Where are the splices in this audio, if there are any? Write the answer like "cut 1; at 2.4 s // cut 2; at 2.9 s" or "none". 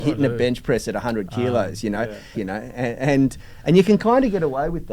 cut 1; at 2.3 s